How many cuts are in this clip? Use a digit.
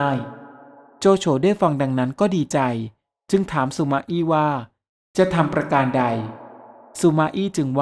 0